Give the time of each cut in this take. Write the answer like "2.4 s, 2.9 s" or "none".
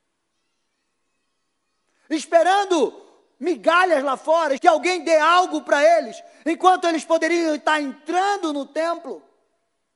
4.6 s